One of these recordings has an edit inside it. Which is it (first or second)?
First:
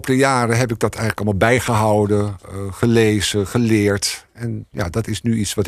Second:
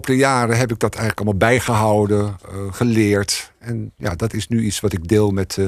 second